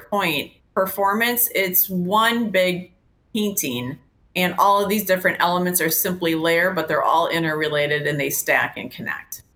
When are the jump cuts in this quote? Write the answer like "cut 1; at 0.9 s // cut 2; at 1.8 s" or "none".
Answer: none